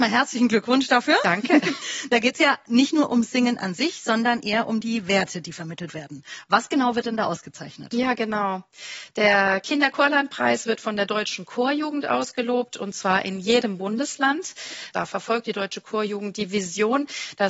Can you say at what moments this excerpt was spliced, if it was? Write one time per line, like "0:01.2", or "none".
0:14.9